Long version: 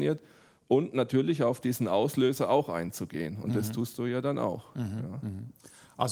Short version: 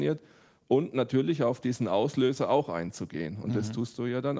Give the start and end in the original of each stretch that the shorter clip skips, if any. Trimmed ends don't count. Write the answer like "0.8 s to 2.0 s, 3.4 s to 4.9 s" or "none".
none